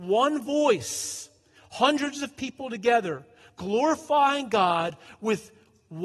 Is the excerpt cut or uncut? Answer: uncut